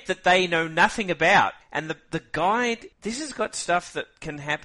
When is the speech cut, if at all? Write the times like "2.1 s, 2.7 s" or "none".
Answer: 1.6 s, 2.9 s